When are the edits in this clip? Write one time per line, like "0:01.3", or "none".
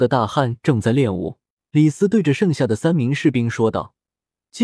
0:01.6